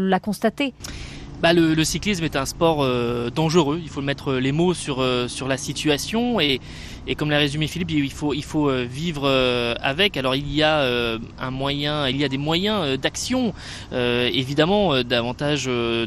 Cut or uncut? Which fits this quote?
uncut